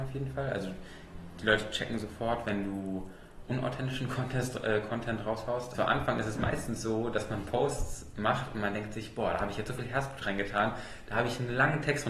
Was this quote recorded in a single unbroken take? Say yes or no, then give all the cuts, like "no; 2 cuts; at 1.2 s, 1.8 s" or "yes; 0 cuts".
no; 2 cuts; at 3.5 s, 5.7 s